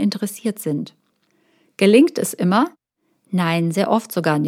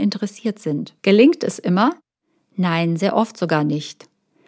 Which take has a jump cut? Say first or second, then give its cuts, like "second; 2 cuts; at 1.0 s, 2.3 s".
second; 1 cut; at 1.0 s